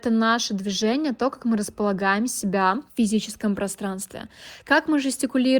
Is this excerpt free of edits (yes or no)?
no